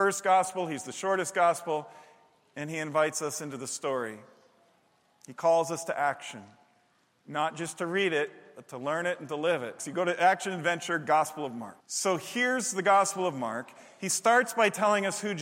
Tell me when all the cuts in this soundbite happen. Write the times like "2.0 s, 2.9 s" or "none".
9.8 s, 11.8 s